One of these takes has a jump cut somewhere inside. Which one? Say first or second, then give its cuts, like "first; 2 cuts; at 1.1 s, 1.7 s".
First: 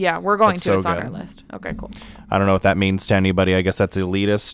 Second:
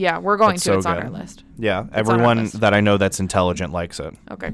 first; 1 cut; at 1.5 s